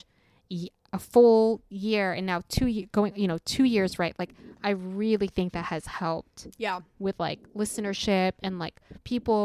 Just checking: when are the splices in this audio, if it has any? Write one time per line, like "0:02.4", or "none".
none

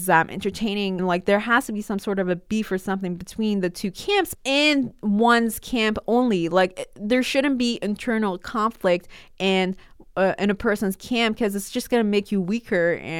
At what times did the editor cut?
0:01.0
0:04.3

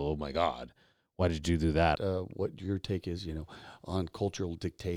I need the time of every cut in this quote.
0:02.0

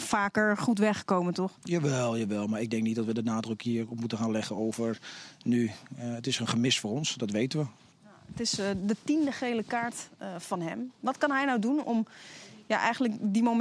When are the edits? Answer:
0:07.9
0:11.8

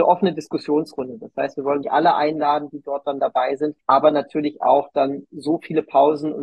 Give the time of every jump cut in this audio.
0:01.8
0:03.8

